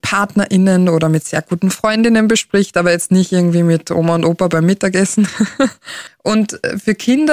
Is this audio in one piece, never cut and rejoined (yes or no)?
yes